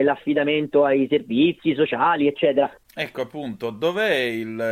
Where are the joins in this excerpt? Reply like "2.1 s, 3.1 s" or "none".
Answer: 2.8 s